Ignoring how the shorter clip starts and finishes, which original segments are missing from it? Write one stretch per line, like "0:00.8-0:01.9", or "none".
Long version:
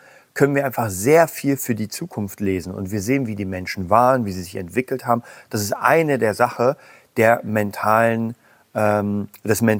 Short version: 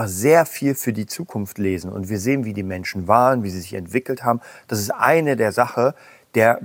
none